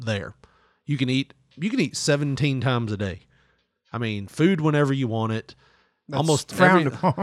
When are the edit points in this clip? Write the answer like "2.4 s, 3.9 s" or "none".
none

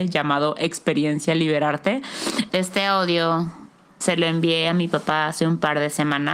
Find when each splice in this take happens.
2.5 s, 4.0 s

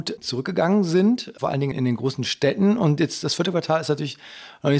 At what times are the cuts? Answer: 1.7 s

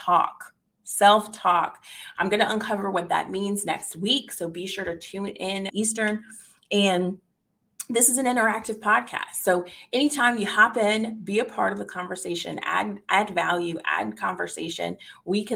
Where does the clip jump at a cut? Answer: 5.7 s

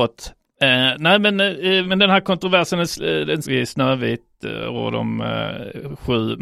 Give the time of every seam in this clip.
1.8 s, 3.4 s

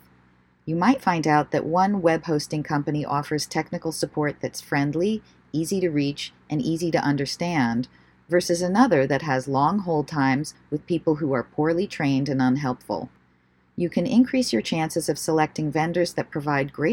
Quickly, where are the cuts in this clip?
none

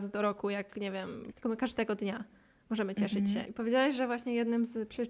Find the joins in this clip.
1.3 s, 3.5 s

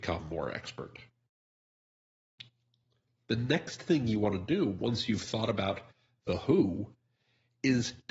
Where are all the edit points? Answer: none

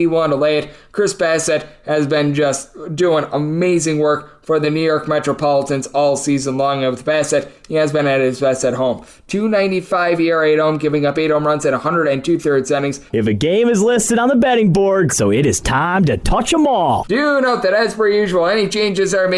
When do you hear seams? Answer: 13.1 s, 15.1 s

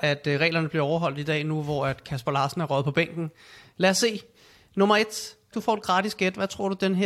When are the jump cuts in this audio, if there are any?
5.5 s

